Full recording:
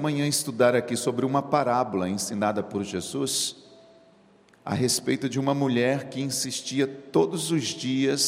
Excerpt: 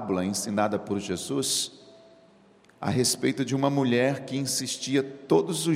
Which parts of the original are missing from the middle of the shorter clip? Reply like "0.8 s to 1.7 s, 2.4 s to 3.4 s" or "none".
none